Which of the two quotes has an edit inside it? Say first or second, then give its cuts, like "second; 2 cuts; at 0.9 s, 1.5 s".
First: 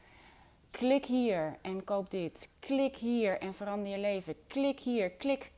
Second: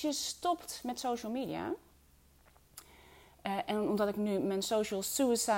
first; 1 cut; at 2.5 s